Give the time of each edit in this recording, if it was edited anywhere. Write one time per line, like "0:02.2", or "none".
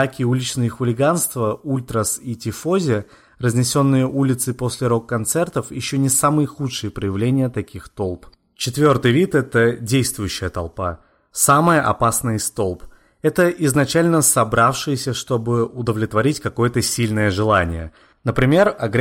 none